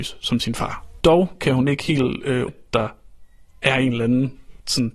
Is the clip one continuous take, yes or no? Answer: no